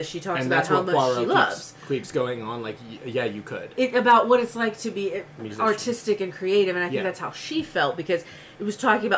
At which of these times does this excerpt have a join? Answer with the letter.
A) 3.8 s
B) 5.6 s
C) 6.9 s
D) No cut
A